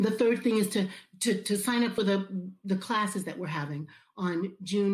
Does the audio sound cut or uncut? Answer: uncut